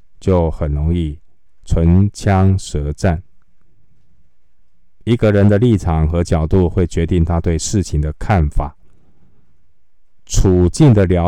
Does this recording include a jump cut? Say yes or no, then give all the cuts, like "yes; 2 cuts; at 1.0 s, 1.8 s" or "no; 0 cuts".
yes; 1 cut; at 10.2 s